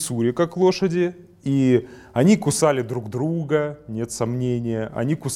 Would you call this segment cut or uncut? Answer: uncut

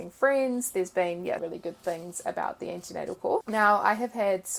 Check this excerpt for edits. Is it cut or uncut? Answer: cut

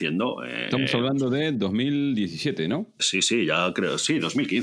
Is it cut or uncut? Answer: cut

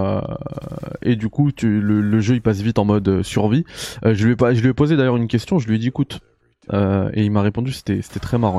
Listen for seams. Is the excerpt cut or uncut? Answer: uncut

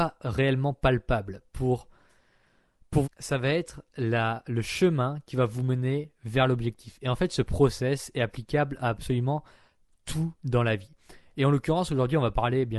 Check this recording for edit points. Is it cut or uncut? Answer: cut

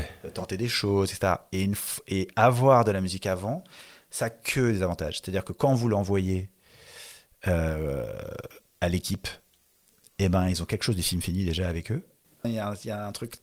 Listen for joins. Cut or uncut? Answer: cut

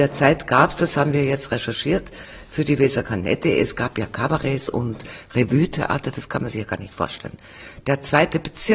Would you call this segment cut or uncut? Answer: uncut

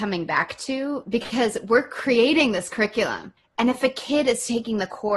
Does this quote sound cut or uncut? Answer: cut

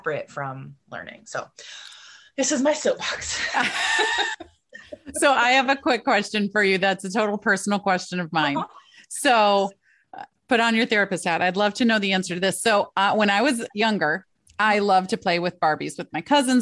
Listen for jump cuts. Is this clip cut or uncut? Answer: uncut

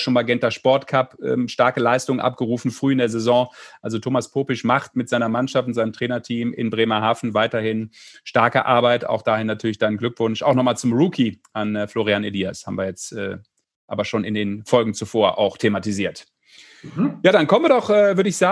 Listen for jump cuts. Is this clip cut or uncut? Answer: uncut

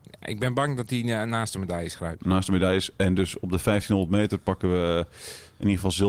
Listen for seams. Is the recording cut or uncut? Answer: uncut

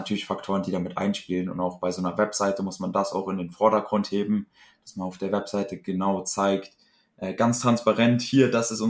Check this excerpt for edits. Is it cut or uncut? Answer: uncut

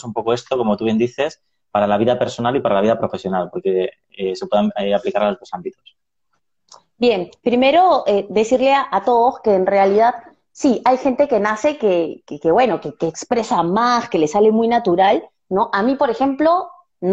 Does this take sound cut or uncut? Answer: uncut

